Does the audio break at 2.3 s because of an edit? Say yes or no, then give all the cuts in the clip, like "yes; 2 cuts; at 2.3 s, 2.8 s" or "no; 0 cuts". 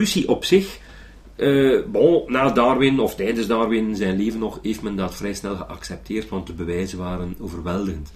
no; 0 cuts